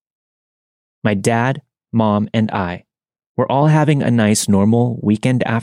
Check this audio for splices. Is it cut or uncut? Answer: uncut